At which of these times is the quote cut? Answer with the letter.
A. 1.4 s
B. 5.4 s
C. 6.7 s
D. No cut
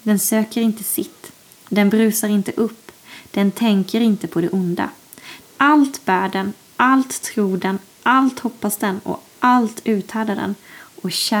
B